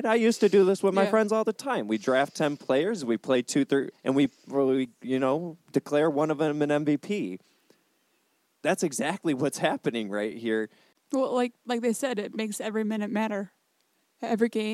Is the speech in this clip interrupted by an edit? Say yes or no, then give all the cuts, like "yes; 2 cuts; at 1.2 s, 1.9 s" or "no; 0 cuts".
yes; 1 cut; at 3.9 s